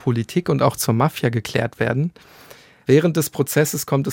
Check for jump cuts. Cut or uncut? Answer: uncut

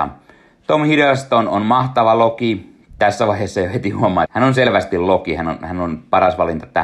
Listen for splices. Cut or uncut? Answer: cut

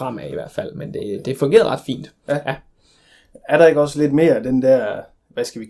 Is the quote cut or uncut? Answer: uncut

